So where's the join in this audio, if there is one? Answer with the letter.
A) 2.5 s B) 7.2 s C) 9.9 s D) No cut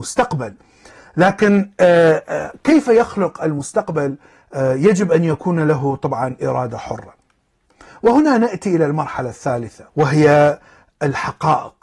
C